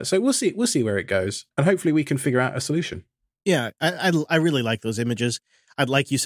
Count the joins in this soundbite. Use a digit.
0